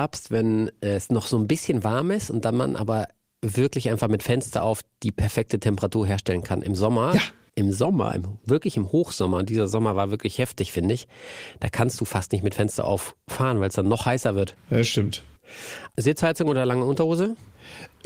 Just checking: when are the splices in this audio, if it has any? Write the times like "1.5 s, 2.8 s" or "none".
none